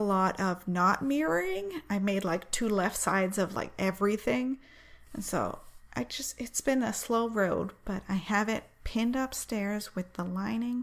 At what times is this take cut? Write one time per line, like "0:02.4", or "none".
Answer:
none